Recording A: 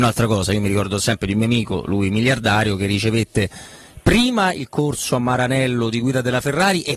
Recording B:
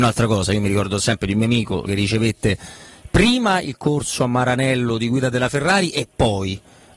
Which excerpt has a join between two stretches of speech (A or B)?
B